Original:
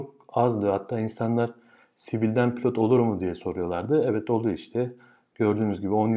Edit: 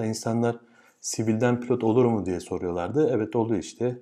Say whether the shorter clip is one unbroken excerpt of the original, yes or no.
yes